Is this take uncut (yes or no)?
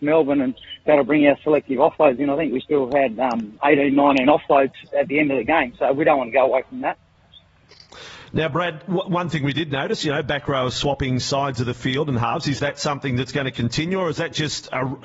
yes